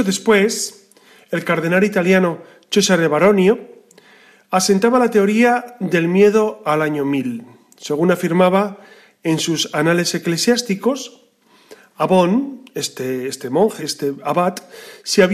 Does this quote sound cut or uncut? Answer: cut